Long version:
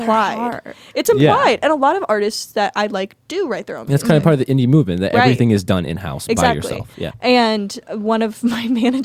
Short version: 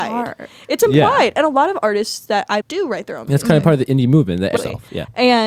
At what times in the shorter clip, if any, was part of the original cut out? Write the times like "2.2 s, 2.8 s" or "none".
2.6 s, 4.6 s